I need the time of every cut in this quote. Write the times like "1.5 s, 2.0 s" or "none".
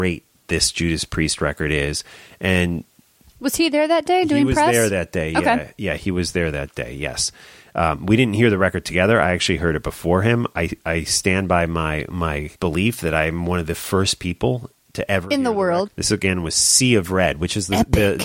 12.5 s, 15.9 s